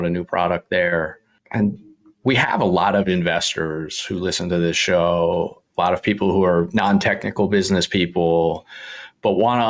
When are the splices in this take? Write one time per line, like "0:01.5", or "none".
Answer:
none